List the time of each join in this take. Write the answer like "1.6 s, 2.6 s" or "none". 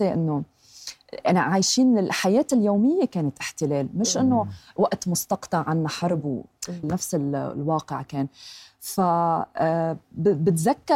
6.8 s